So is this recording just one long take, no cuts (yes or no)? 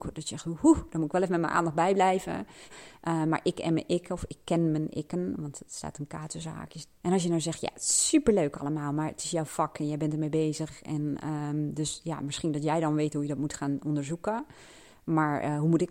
no